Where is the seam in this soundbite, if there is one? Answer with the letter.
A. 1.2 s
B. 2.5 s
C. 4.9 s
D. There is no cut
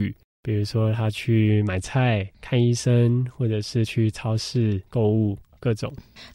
C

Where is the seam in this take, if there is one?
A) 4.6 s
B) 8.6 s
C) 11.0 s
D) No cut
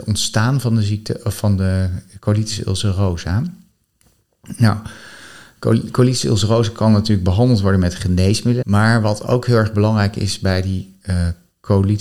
B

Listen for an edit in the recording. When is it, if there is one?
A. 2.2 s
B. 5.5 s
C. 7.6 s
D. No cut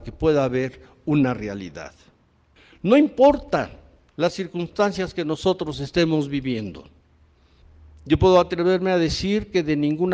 D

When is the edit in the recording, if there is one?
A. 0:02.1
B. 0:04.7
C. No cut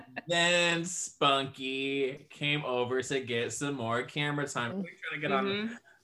B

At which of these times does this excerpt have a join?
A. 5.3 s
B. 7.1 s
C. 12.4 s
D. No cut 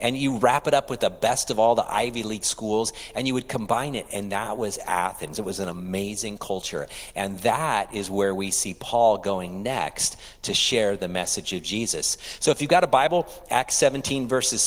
D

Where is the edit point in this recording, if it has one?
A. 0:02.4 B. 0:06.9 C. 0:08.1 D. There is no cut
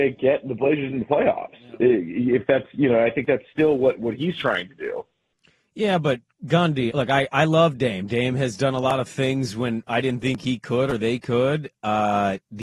B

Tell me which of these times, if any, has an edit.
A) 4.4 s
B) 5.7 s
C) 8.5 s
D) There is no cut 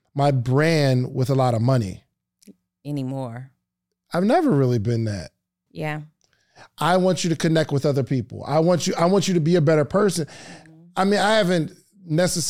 B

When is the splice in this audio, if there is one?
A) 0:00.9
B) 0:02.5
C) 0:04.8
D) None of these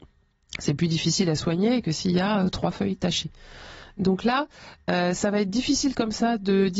D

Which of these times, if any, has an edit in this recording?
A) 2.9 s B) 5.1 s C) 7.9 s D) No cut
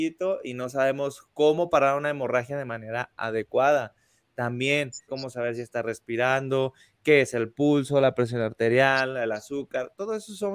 B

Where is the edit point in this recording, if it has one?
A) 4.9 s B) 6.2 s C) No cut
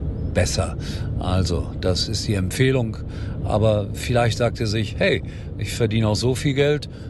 C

